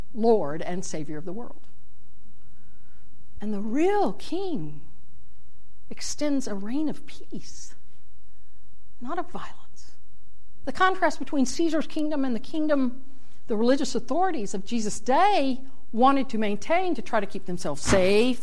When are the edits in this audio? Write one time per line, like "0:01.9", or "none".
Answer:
0:03.4
0:10.6